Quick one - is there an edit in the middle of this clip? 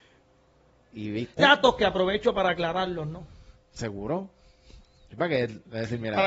yes; 1 cut; at 1.4 s

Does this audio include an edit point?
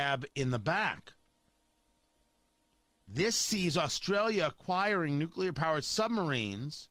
no; 0 cuts

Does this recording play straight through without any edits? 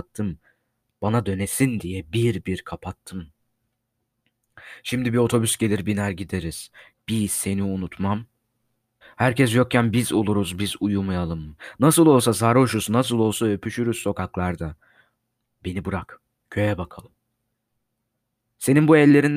no; 2 cuts; at 6.9 s, 9.0 s

